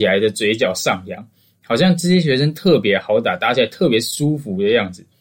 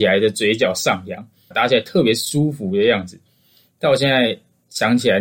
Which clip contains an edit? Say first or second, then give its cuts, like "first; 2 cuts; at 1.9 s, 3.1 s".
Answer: second; 1 cut; at 1.5 s